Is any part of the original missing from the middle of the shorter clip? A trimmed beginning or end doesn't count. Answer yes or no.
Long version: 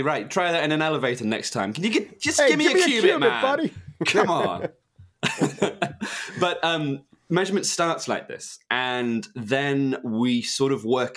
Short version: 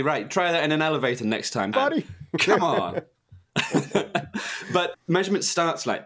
yes